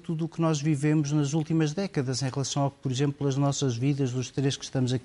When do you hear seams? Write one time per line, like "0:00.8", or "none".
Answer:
none